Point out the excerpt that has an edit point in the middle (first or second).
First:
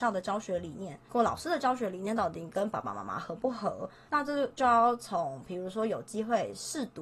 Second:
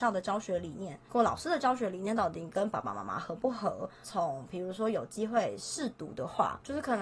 second